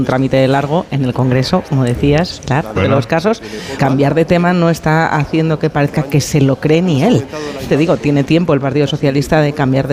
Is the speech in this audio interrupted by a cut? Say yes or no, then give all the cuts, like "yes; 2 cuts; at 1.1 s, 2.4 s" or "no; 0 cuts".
yes; 3 cuts; at 2.7 s, 3.8 s, 7.7 s